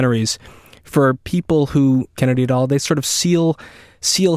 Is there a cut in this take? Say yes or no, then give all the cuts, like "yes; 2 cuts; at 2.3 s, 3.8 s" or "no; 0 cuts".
yes; 1 cut; at 2.2 s